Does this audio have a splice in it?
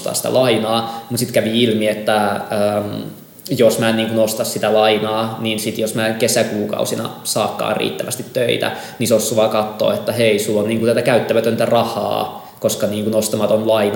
no; 0 cuts

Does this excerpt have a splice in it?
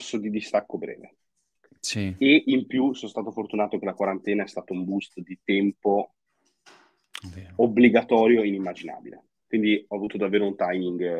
no; 0 cuts

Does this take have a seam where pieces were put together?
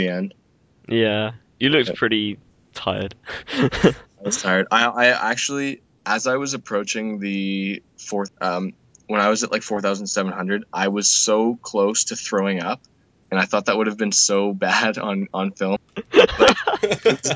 yes; 2 cuts; at 8.3 s, 15.8 s

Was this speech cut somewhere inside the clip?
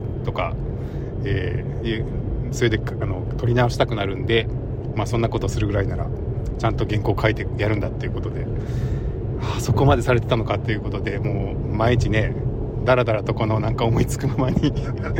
no; 0 cuts

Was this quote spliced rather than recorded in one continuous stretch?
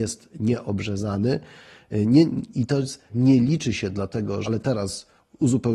yes; 2 cuts; at 3.1 s, 4.4 s

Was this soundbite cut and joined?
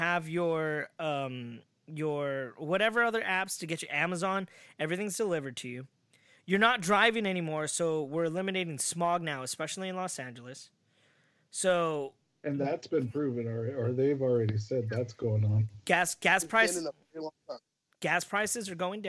no; 0 cuts

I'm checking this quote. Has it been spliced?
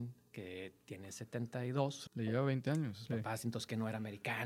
yes; 2 cuts; at 2.1 s, 3.1 s

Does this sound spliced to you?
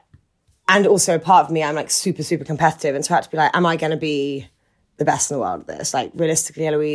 no; 0 cuts

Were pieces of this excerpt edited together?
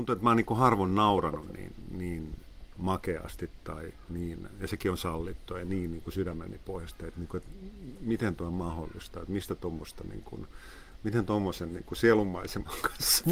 no; 0 cuts

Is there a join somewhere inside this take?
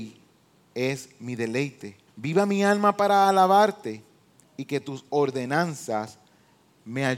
yes; 1 cut; at 2.1 s

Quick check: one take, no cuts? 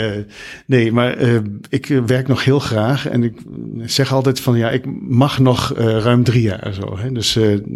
yes; 0 cuts

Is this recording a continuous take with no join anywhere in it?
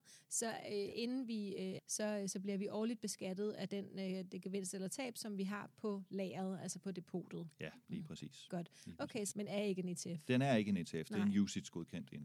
no; 2 cuts; at 1.8 s, 9.3 s

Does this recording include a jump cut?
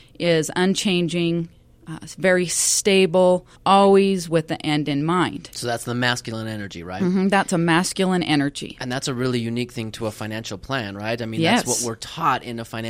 yes; 1 cut; at 3.5 s

